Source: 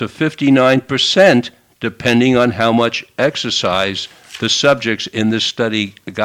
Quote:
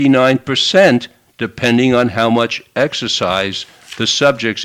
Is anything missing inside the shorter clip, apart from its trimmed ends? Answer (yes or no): no